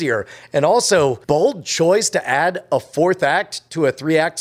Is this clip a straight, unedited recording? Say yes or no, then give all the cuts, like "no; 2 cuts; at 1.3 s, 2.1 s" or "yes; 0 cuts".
no; 1 cut; at 1.2 s